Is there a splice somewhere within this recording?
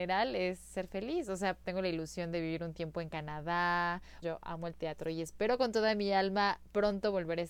yes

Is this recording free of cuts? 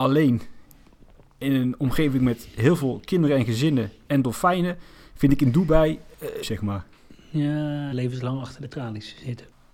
no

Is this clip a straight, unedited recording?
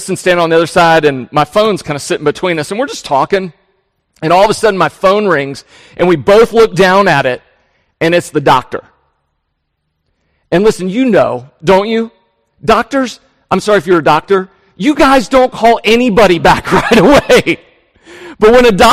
yes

